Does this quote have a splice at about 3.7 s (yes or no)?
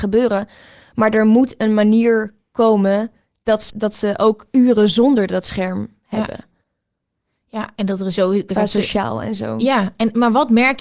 yes